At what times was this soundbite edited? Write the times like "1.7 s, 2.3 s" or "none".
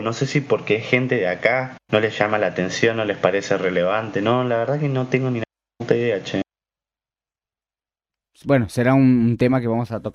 1.8 s